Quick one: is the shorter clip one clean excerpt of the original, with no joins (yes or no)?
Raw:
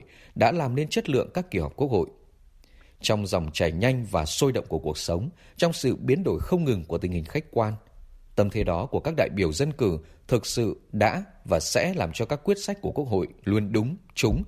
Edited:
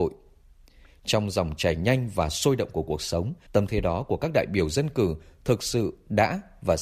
no